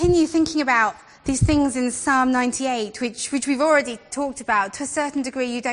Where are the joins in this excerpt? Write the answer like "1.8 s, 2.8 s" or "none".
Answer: none